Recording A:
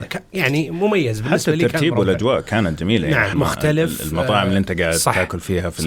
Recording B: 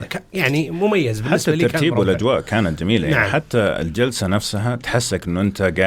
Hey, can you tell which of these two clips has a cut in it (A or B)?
A